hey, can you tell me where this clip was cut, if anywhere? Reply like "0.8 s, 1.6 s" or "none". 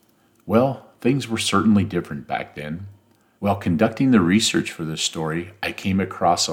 3.4 s